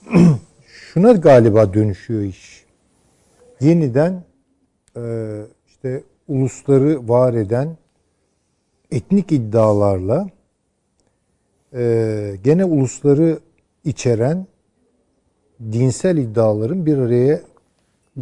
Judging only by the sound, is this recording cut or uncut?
uncut